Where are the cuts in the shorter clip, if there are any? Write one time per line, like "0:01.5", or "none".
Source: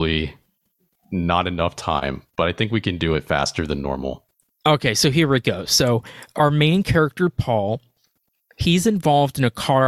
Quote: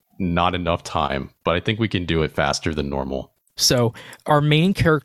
0:03.6